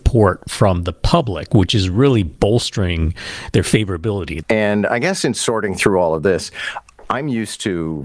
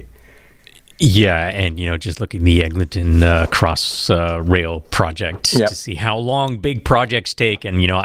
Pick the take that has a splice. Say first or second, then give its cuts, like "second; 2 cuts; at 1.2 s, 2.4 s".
first; 1 cut; at 4.4 s